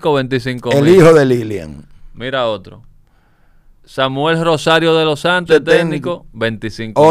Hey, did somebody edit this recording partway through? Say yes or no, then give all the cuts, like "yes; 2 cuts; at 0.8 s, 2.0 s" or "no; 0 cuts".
yes; 1 cut; at 5.5 s